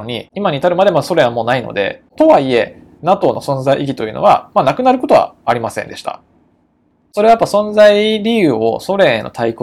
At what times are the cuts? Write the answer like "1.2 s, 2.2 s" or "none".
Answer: none